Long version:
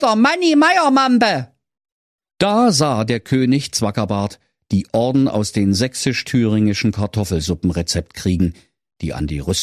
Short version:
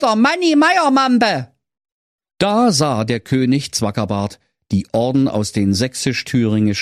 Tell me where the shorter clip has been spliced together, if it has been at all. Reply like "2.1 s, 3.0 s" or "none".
none